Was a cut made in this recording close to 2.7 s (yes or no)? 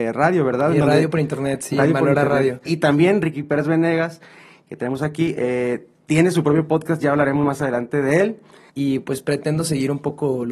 yes